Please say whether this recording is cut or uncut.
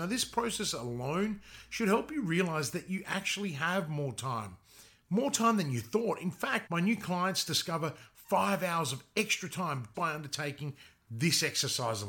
cut